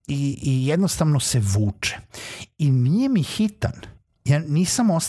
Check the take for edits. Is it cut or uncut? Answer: uncut